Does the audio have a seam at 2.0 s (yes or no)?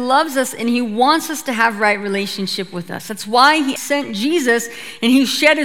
no